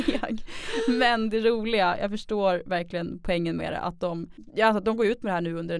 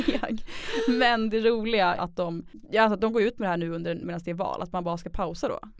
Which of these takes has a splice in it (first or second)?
second